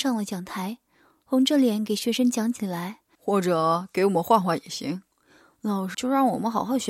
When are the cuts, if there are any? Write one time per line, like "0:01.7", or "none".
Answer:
0:03.1
0:05.9